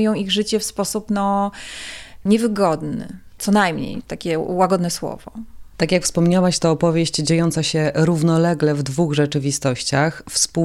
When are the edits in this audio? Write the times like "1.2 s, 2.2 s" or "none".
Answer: 4.0 s